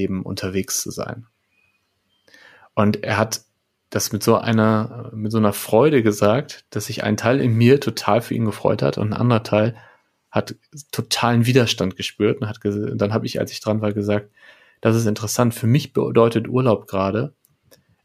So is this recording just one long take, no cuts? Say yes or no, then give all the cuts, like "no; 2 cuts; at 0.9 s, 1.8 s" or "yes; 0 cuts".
yes; 0 cuts